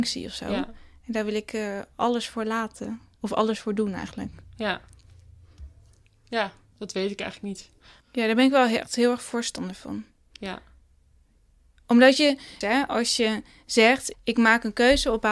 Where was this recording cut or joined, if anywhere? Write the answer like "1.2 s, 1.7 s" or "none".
8.0 s, 12.6 s, 14.1 s